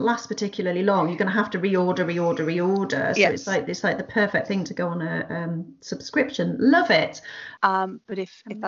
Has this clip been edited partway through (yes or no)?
yes